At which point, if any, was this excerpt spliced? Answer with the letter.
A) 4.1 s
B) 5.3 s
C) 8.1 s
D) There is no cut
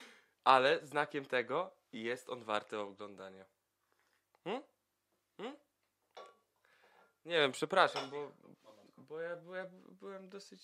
D